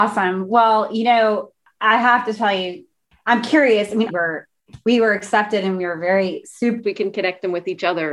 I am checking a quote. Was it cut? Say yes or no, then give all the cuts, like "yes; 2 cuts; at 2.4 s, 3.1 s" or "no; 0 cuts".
yes; 2 cuts; at 4.1 s, 6.8 s